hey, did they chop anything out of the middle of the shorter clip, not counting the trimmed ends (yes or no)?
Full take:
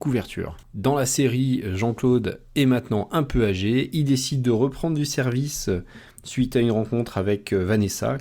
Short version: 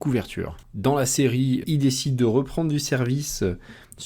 yes